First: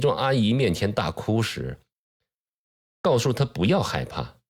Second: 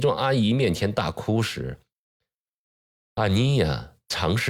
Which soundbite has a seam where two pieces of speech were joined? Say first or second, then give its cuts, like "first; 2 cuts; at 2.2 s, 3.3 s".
first; 1 cut; at 2.9 s